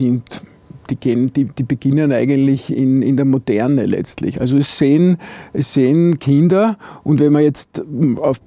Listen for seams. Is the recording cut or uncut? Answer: cut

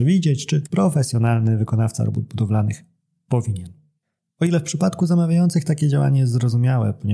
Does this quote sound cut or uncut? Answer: uncut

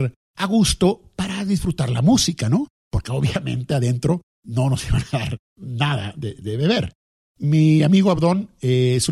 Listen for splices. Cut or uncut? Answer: uncut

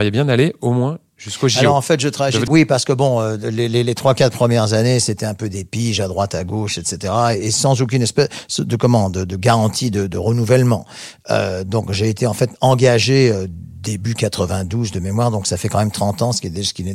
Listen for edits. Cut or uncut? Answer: cut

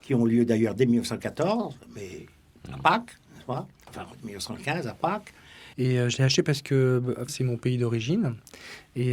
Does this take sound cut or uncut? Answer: cut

